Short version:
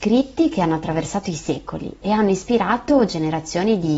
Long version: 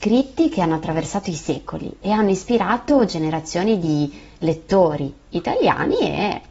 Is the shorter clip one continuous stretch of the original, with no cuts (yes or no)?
yes